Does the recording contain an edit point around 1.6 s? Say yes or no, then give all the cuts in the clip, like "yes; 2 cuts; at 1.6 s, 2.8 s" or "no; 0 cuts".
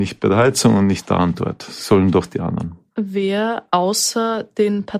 no; 0 cuts